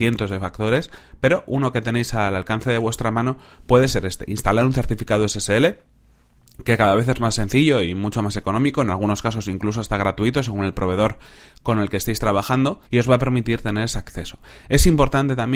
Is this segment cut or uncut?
cut